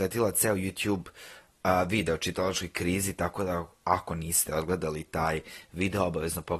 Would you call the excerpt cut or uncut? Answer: uncut